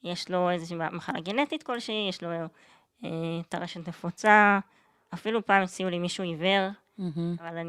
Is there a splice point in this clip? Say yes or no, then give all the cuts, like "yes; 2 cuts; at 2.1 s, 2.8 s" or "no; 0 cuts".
no; 0 cuts